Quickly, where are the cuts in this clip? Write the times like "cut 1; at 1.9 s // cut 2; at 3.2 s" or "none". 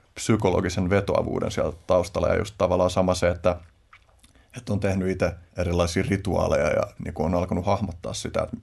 cut 1; at 5.5 s // cut 2; at 7.0 s